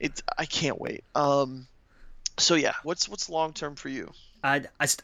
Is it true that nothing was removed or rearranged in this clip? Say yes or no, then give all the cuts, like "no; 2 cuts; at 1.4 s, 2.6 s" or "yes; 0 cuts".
no; 1 cut; at 2.8 s